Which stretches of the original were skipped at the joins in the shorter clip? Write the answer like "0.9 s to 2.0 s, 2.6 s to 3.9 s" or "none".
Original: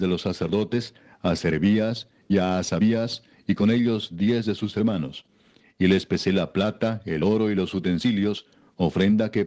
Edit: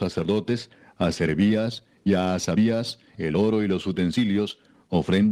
3.4 s to 7.0 s